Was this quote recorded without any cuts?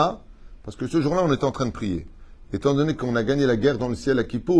yes; 0 cuts

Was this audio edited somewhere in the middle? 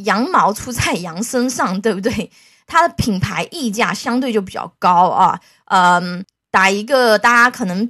no; 0 cuts

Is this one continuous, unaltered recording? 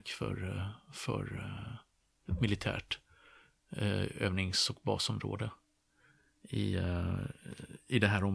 yes; 0 cuts

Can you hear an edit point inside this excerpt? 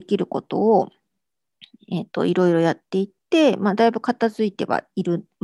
no; 0 cuts

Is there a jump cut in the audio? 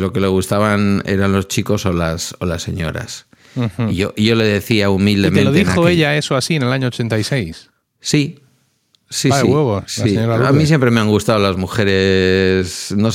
no; 0 cuts

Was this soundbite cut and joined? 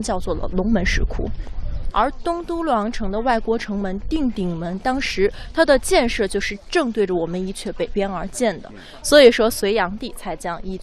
yes; 2 cuts; at 1.9 s, 9.0 s

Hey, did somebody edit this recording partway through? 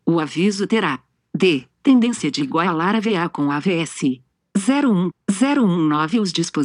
yes; 1 cut; at 5.1 s

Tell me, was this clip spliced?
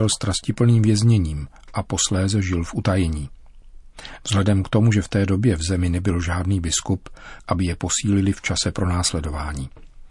yes; 1 cut; at 7.4 s

